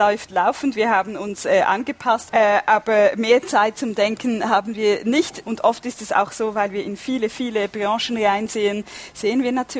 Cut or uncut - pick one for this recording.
cut